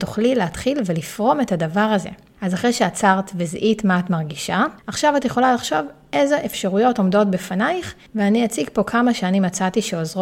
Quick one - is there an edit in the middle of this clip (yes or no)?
no